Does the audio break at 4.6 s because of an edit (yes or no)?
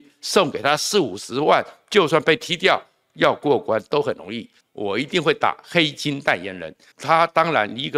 yes